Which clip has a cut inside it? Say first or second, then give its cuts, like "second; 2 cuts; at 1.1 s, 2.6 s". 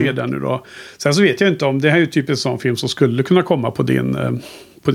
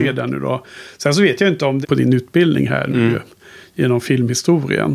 second; 1 cut; at 1.8 s